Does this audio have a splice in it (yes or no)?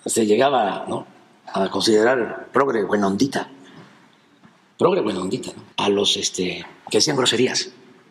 yes